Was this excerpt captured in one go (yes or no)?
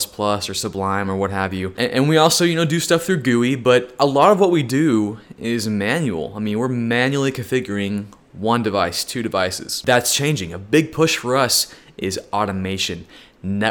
yes